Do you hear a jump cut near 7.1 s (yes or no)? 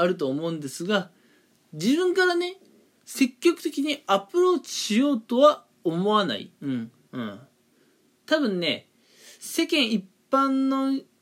yes